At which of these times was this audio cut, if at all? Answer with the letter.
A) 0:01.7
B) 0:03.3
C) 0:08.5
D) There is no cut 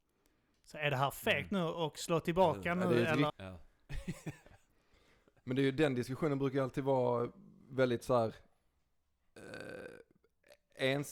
B